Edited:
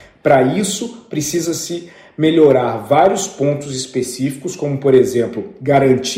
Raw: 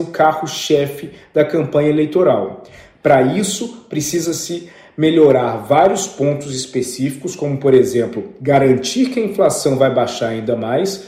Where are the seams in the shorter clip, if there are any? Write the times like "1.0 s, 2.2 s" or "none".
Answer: none